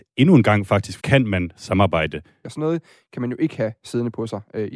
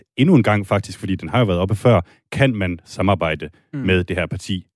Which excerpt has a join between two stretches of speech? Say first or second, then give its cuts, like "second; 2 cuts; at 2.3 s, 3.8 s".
first; 2 cuts; at 1.0 s, 2.4 s